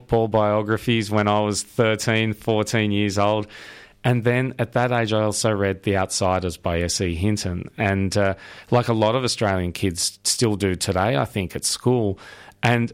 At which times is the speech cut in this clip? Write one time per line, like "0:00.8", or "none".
none